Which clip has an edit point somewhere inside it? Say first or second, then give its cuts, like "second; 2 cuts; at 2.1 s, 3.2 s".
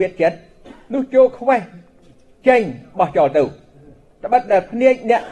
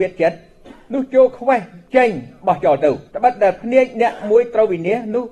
second; 2 cuts; at 1.9 s, 3.1 s